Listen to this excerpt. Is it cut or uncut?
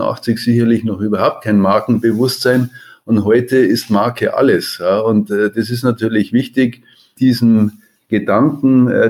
uncut